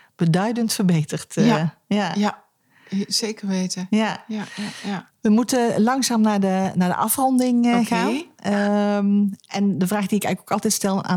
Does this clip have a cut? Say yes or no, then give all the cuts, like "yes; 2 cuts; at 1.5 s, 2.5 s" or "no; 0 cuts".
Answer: no; 0 cuts